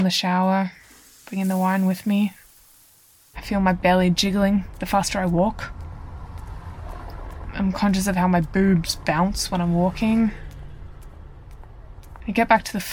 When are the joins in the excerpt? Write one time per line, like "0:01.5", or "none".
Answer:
0:03.3